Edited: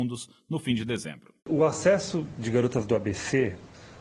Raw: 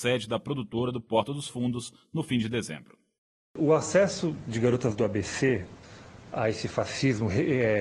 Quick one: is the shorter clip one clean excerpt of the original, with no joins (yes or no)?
no